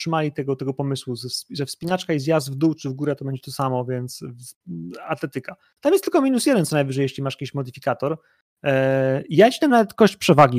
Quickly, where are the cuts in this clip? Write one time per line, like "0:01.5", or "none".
none